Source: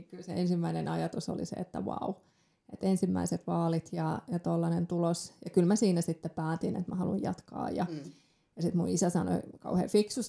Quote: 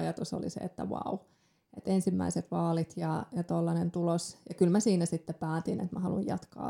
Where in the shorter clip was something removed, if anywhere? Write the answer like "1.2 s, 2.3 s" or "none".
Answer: none